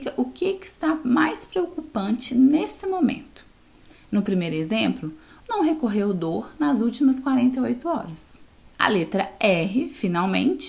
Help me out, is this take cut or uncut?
cut